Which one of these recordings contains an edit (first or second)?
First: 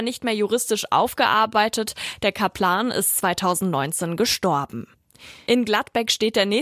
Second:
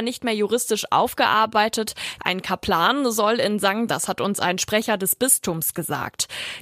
second